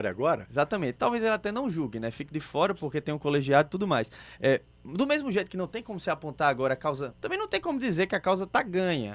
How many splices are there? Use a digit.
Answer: 1